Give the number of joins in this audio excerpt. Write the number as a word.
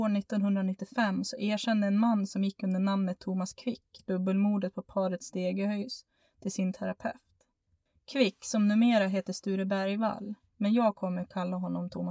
zero